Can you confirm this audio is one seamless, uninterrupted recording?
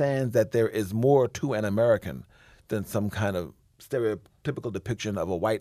yes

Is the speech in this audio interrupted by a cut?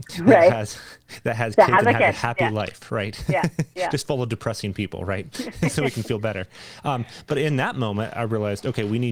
no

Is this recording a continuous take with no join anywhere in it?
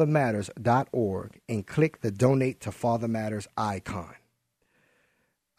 yes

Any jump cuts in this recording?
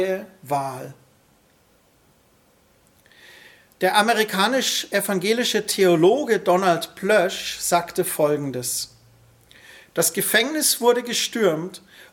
no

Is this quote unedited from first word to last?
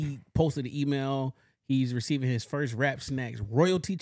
yes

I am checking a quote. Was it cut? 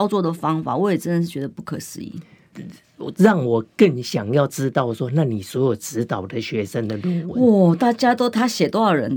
yes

